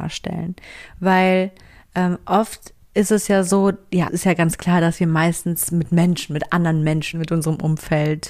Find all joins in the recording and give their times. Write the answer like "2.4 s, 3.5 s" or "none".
4.1 s, 7.1 s